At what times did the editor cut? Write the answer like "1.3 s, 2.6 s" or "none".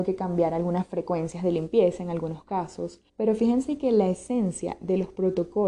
3.1 s